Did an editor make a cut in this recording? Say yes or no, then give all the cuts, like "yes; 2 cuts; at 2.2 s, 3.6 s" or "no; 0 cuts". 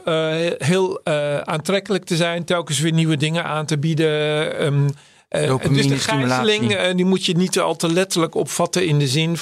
no; 0 cuts